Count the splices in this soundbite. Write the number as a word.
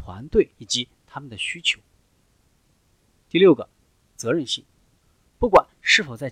zero